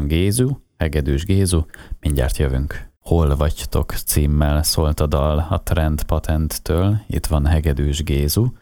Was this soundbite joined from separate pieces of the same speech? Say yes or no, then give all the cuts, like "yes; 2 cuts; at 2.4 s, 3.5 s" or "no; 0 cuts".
yes; 1 cut; at 3.0 s